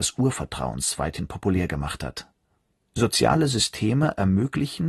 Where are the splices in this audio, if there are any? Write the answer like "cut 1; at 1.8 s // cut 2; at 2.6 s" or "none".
cut 1; at 2.8 s